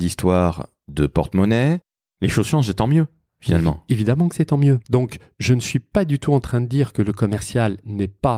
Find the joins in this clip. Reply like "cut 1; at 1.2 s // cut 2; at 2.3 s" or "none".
cut 1; at 4.8 s